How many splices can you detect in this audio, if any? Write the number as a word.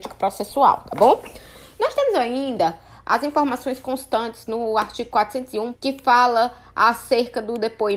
one